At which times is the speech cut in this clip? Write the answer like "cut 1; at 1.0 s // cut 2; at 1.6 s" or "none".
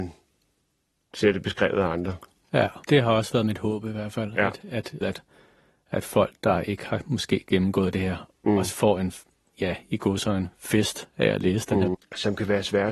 cut 1; at 2.8 s // cut 2; at 5.0 s // cut 3; at 11.9 s